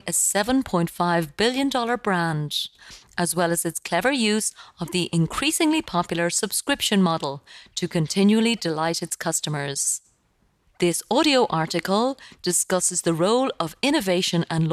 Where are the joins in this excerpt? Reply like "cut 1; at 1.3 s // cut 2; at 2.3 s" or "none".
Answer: cut 1; at 10.7 s